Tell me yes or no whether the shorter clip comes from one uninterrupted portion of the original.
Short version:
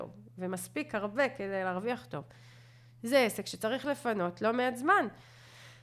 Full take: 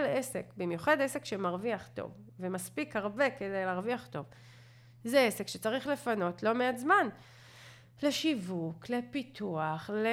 yes